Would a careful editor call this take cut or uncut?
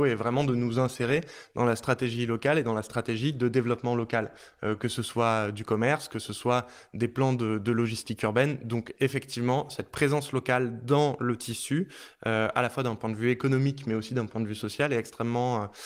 uncut